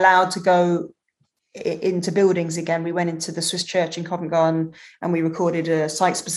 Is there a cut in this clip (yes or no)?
no